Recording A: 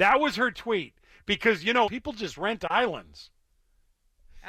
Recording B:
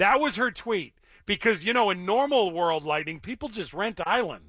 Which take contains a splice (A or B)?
A